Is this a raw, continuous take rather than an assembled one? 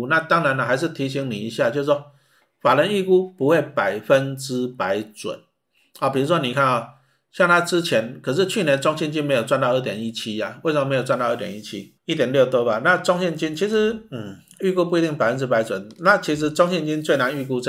no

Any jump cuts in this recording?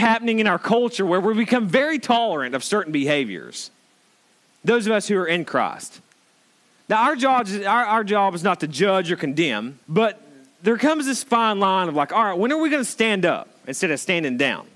yes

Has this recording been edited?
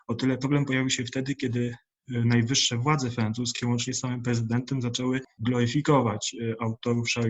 no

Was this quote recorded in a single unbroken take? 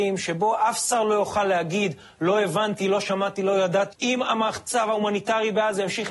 no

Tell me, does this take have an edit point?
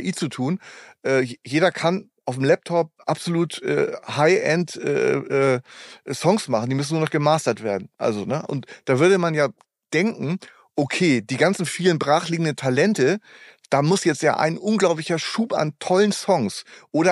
no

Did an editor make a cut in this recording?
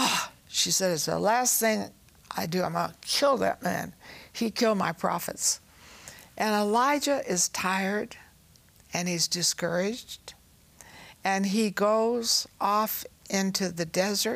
no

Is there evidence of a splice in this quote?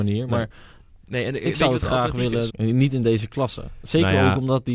yes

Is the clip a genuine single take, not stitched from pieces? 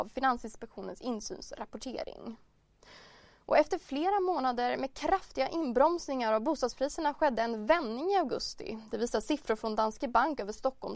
yes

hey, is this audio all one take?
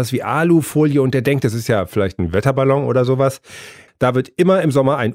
no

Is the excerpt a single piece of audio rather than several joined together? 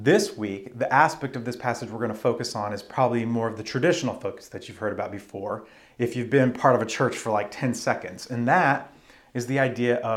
yes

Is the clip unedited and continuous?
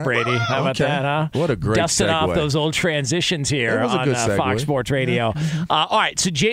yes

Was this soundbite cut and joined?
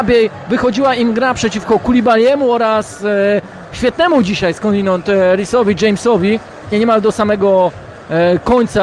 yes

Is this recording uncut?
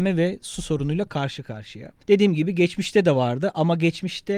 no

